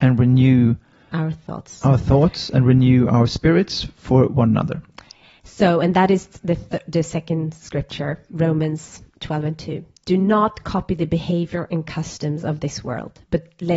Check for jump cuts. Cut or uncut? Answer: uncut